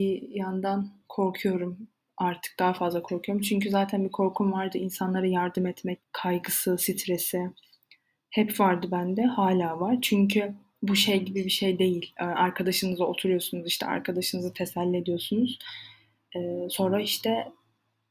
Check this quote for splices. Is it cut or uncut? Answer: cut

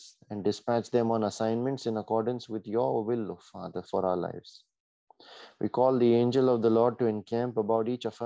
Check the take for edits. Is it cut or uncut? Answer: uncut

